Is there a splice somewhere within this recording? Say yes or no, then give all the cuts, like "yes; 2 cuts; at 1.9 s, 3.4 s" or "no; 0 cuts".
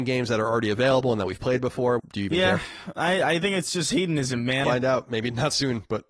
yes; 2 cuts; at 2.0 s, 4.6 s